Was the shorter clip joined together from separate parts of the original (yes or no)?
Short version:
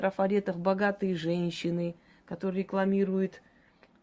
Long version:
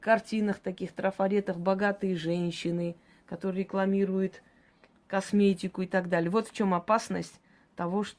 no